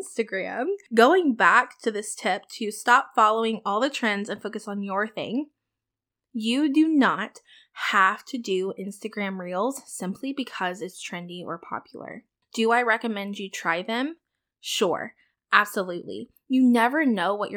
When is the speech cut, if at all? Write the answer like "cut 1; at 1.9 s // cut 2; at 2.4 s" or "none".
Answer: none

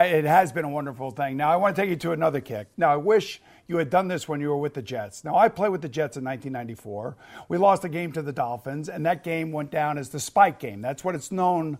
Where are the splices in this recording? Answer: none

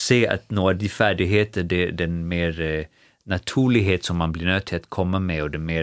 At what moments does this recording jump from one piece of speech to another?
none

